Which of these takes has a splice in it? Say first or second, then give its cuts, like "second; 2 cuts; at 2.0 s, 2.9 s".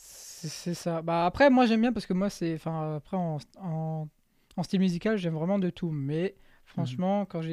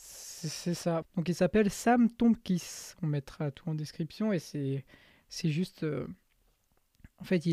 second; 1 cut; at 1.0 s